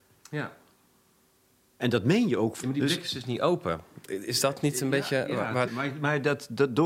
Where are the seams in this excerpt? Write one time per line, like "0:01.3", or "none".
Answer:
0:02.6
0:05.7